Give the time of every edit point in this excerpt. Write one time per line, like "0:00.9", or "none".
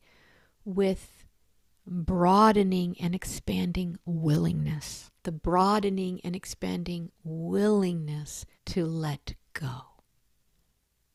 0:05.2
0:08.5